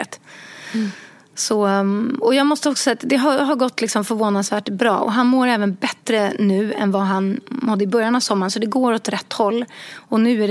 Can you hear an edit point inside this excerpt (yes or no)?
no